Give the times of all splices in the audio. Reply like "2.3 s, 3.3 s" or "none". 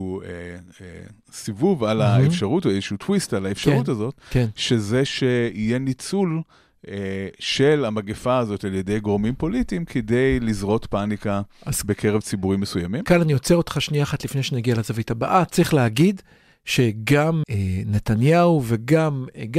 17.4 s